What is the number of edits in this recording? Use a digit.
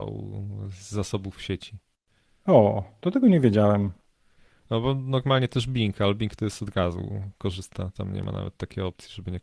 0